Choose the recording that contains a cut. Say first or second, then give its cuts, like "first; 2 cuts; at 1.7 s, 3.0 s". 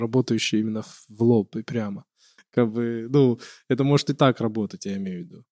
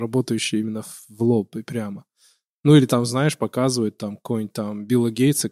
first; 1 cut; at 2.4 s